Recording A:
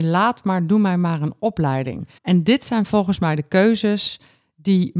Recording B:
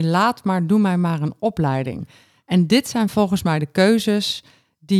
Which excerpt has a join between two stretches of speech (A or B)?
A